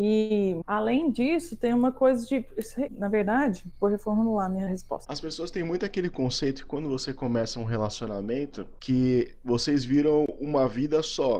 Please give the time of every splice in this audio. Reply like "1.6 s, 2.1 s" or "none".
5.1 s